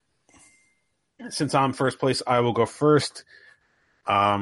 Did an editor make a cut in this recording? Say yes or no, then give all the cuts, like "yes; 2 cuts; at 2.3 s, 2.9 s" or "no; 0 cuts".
no; 0 cuts